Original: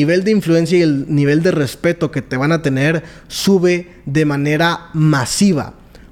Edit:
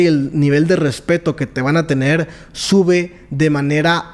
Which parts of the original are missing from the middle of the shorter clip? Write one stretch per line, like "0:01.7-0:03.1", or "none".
none